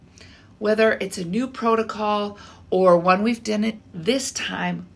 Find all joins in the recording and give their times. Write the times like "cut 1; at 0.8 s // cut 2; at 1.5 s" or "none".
cut 1; at 3.8 s